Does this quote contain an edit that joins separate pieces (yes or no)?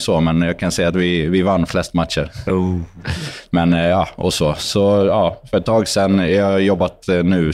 no